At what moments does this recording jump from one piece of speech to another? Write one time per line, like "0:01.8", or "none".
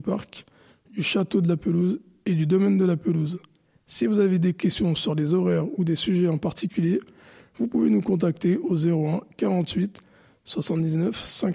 none